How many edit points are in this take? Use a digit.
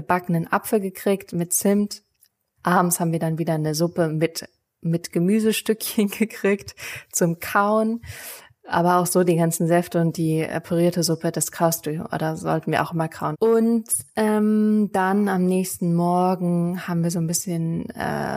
2